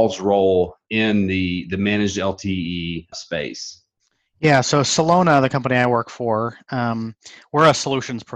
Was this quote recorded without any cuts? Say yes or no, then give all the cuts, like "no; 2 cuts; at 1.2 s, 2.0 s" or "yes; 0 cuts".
no; 1 cut; at 3.1 s